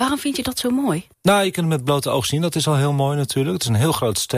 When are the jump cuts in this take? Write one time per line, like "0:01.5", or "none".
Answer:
0:01.1